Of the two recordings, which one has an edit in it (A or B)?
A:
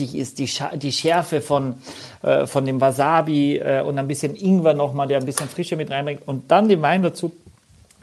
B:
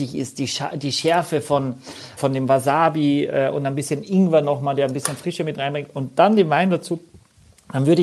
B